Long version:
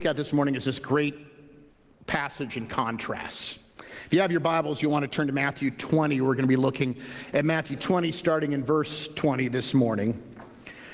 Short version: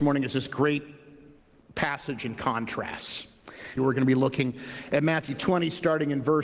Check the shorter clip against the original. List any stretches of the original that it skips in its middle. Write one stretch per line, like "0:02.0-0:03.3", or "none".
0:04.1-0:06.2